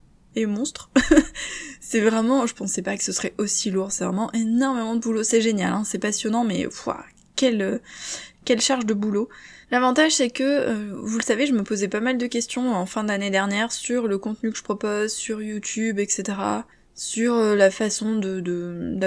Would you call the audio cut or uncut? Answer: cut